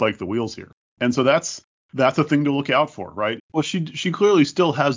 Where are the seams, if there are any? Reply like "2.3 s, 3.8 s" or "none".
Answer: 3.4 s